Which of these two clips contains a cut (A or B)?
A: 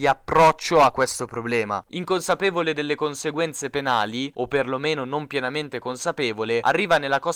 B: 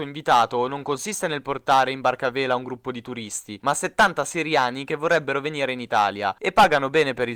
A